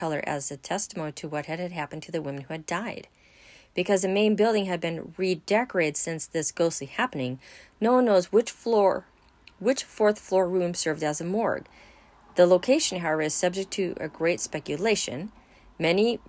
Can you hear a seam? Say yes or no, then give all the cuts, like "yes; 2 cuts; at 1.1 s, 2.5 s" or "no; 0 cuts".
no; 0 cuts